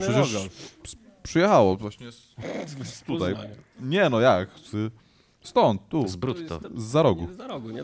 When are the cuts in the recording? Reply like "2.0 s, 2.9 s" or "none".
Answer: none